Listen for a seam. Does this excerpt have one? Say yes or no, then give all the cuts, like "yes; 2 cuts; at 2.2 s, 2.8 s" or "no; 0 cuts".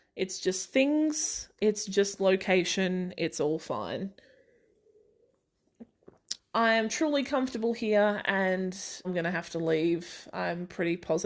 yes; 2 cuts; at 6.4 s, 9.0 s